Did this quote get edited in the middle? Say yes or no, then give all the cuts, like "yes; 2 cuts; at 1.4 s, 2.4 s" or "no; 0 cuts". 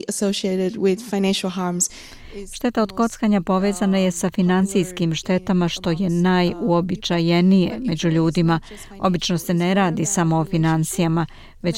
no; 0 cuts